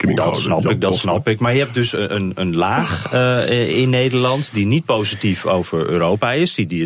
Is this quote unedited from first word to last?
yes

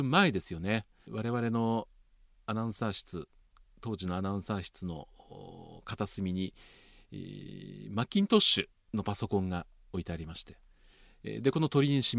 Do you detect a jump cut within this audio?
yes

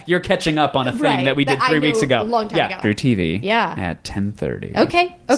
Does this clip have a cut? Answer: yes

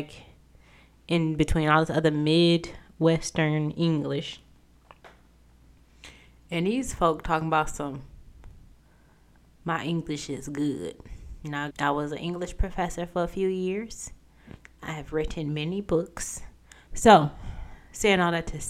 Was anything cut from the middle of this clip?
yes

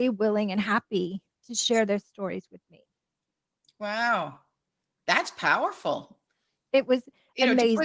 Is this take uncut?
yes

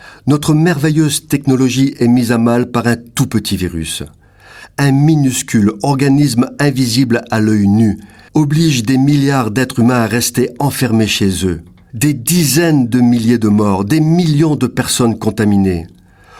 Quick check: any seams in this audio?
yes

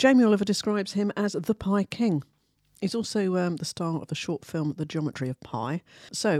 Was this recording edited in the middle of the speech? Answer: no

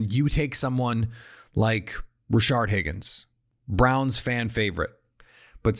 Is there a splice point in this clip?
no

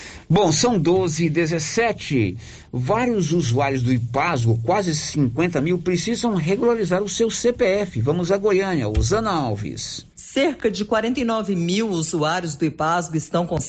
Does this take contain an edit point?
yes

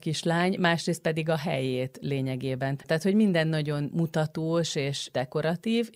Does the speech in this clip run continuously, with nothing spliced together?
no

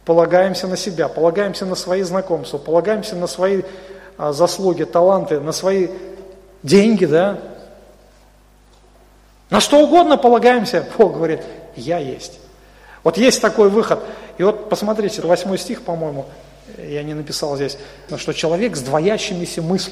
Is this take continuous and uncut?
no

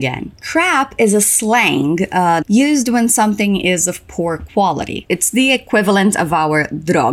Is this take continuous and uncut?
no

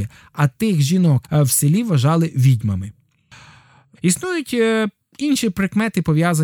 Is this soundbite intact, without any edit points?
no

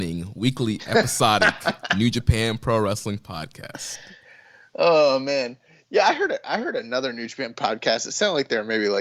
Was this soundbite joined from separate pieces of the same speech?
no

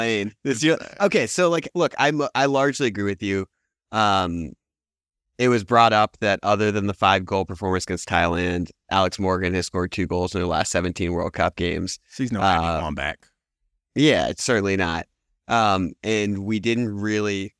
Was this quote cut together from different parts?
no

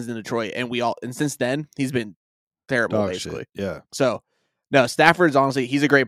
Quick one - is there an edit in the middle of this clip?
yes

